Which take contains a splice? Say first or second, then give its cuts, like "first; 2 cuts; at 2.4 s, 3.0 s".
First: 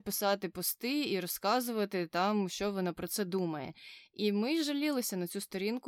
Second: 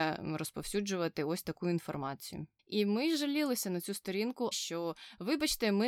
second; 2 cuts; at 2.6 s, 4.5 s